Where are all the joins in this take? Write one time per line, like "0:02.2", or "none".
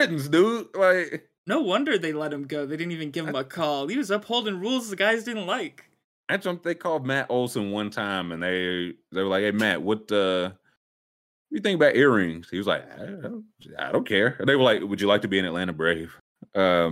none